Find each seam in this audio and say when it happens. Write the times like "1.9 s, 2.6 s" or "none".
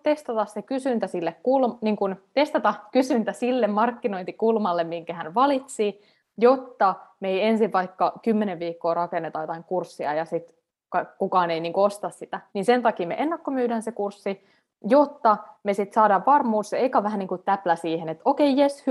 12.5 s